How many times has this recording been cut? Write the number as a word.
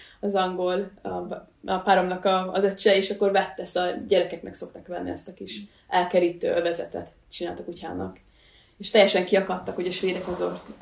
zero